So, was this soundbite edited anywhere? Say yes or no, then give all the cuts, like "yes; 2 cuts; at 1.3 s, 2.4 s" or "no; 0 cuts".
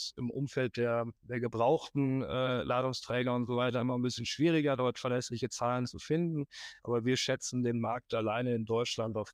no; 0 cuts